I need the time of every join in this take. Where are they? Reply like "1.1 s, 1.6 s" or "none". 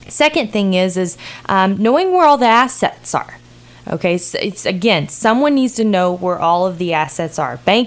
none